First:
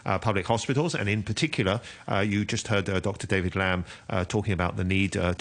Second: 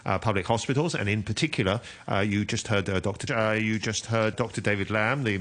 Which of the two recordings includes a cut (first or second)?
second